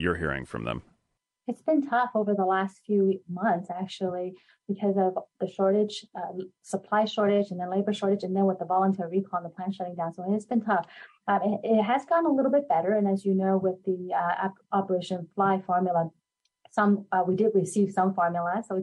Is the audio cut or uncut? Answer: uncut